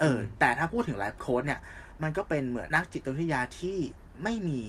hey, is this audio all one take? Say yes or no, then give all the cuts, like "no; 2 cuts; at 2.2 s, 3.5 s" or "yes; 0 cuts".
no; 1 cut; at 2.7 s